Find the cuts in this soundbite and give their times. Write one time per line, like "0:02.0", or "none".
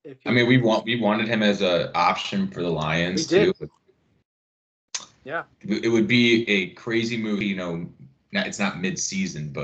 0:05.5
0:07.4